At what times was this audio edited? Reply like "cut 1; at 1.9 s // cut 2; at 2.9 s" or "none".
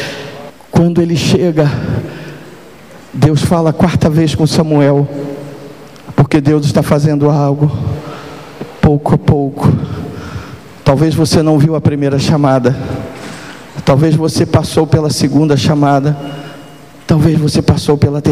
none

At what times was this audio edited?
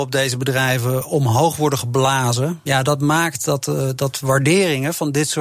cut 1; at 2.7 s

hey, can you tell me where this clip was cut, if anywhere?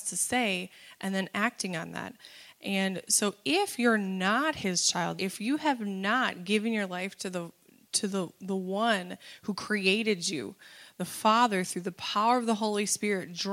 cut 1; at 5.2 s

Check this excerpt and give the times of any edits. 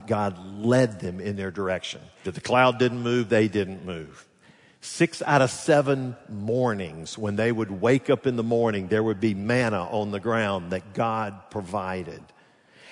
cut 1; at 2.2 s

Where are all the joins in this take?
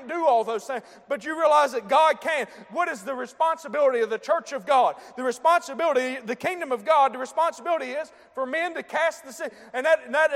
none

